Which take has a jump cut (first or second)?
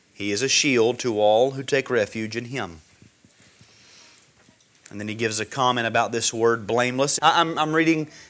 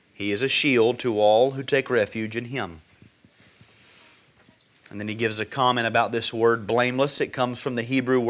first